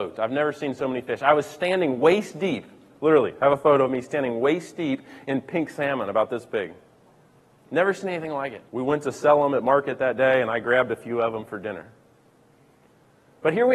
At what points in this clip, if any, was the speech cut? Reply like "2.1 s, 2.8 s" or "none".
8.7 s